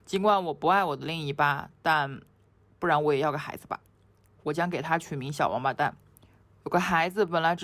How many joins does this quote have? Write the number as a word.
zero